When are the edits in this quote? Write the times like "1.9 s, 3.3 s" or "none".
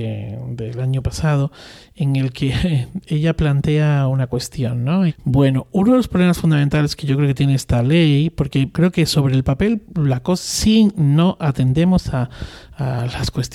5.1 s, 8.7 s